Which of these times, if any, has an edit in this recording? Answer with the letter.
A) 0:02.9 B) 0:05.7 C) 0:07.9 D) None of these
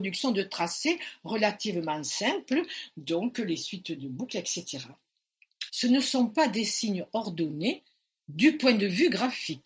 B